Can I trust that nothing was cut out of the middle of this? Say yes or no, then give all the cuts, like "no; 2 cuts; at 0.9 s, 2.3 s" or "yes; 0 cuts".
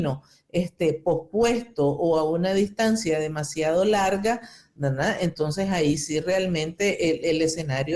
yes; 0 cuts